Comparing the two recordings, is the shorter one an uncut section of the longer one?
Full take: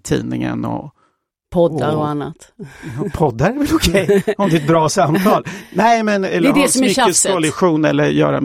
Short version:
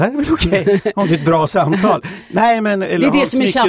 yes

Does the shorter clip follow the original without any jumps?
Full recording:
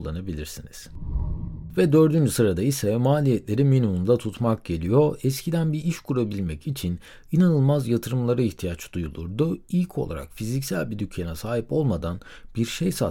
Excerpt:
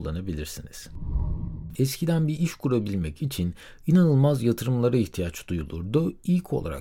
no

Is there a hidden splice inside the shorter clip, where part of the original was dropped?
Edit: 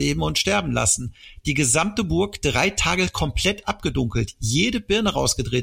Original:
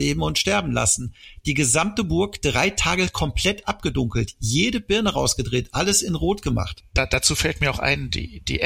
no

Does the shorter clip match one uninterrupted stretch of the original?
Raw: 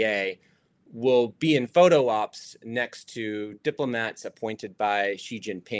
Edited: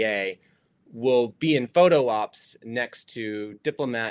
yes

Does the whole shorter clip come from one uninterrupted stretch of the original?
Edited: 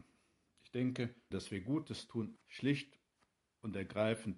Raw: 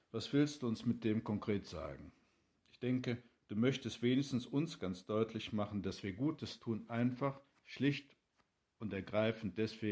no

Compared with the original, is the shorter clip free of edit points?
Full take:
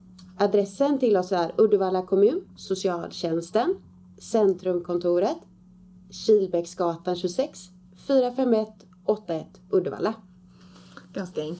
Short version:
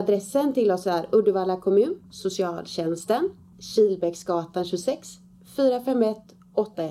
no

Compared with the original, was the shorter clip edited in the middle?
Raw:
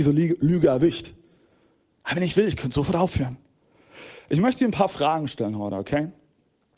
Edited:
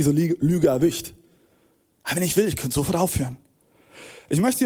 no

